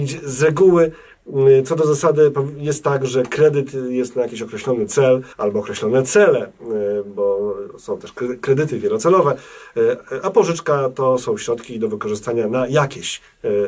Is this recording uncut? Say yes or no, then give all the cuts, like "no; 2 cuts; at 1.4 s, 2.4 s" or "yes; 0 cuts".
no; 1 cut; at 5.3 s